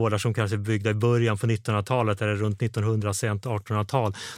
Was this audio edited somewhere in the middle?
no; 0 cuts

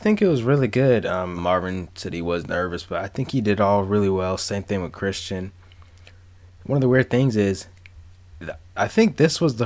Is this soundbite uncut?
no; 1 cut; at 1.4 s

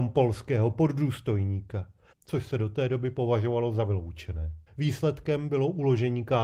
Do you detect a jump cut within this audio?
yes; 2 cuts; at 2.1 s, 4.7 s

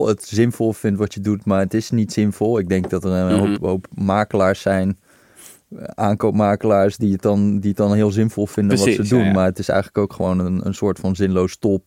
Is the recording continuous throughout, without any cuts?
no; 1 cut; at 3.6 s

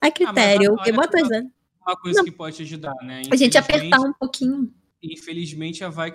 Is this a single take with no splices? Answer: no; 1 cut; at 1.3 s

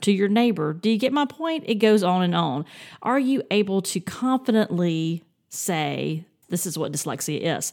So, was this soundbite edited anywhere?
yes; 1 cut; at 6.4 s

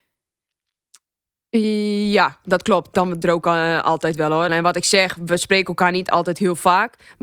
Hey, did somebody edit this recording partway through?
yes; 2 cuts; at 3.2 s, 4.5 s

